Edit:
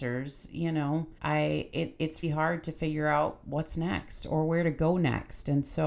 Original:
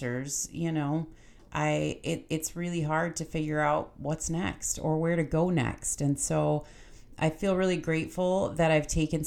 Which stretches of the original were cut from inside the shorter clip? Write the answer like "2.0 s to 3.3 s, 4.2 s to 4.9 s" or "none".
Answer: 1.2 s to 1.5 s, 2.5 s to 2.8 s

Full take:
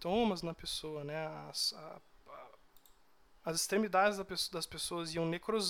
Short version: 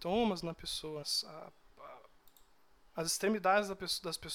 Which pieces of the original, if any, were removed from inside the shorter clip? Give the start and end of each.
1.0 s to 1.5 s

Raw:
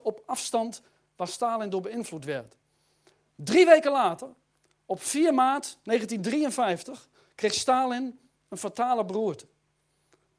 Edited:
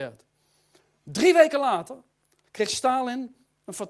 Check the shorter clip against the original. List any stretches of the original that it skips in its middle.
4.8 s to 7.3 s

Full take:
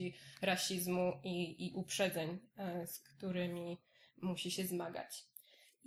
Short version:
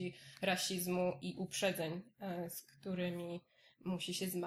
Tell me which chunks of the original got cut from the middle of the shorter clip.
1.2 s to 1.6 s

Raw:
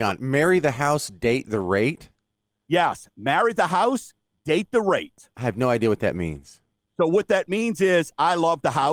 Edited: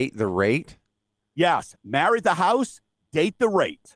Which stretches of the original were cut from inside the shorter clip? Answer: none

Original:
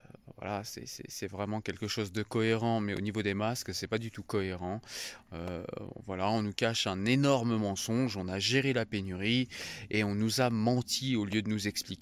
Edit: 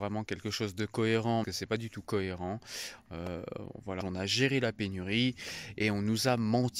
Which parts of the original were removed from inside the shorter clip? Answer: 2.8 s to 3.6 s, 6.2 s to 8.1 s

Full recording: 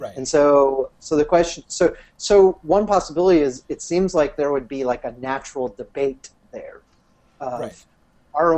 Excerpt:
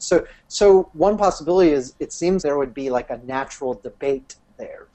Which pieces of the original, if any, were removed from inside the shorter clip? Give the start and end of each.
4.1 s to 4.4 s

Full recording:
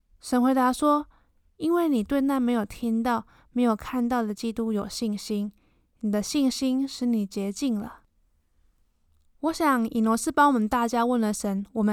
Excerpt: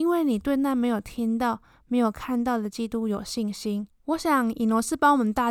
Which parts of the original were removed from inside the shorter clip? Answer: 5.5 s to 9.2 s

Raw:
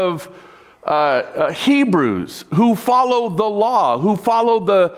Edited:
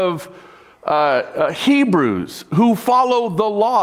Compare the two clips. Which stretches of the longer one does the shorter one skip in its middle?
none

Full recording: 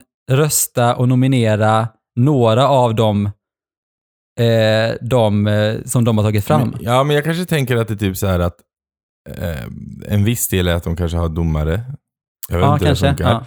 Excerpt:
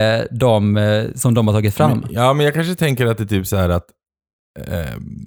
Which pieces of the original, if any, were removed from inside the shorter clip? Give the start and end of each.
none

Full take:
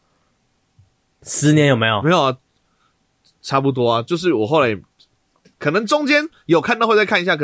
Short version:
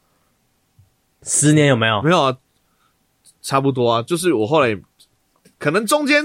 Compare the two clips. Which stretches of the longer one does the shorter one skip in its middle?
none

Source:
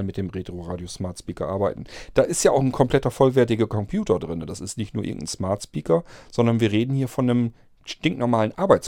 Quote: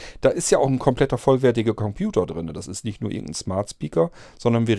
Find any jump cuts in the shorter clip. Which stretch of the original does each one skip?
none

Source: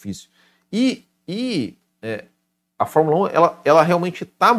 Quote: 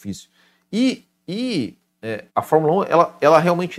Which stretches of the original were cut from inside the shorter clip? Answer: 2.3 s to 2.7 s

